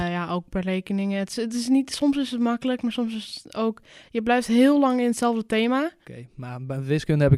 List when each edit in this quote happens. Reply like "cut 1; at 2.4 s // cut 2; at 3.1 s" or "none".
cut 1; at 6.0 s